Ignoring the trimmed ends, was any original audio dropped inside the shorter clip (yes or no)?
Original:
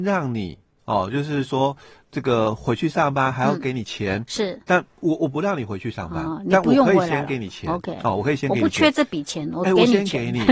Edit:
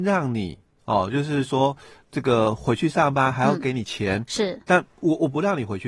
no